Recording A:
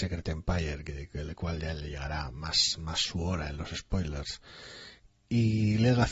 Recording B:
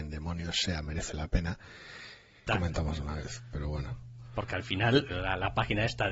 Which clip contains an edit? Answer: B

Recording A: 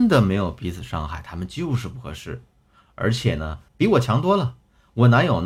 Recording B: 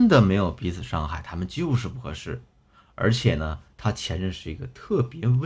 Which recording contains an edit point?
A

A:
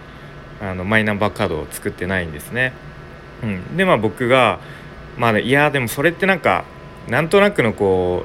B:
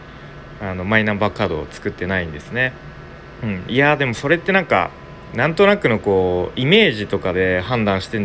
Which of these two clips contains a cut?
B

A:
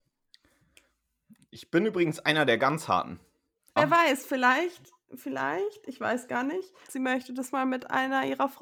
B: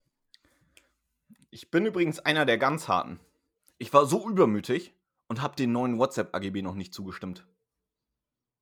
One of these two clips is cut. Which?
A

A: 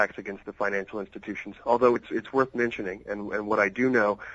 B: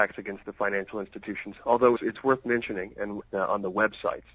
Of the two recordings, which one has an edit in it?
B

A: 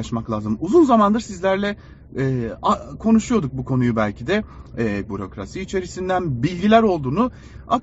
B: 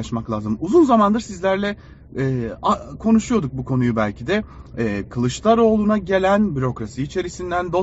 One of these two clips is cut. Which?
A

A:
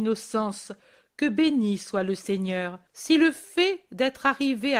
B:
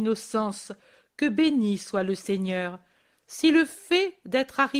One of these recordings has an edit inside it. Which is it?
A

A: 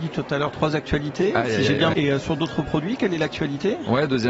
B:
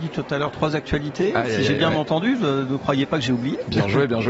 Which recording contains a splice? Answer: A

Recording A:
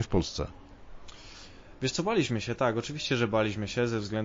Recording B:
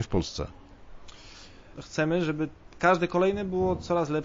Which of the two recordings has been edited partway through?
B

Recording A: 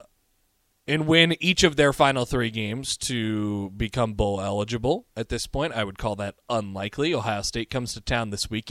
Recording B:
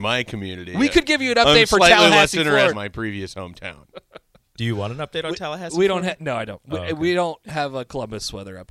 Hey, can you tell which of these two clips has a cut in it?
B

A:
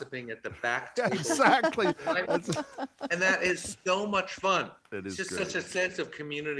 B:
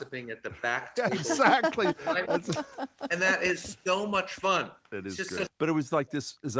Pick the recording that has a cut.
B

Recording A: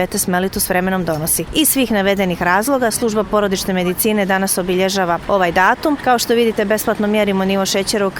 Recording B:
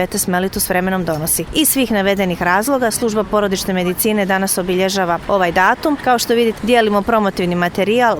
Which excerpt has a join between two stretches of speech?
B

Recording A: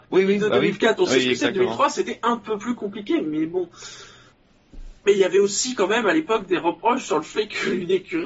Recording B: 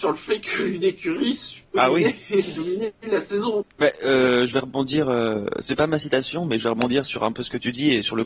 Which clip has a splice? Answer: B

